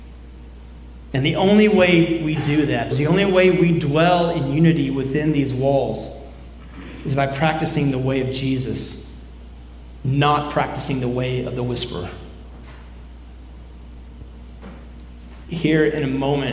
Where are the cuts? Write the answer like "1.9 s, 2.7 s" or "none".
1.1 s, 2.9 s, 15.4 s